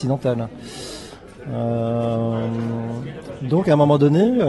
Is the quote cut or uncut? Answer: uncut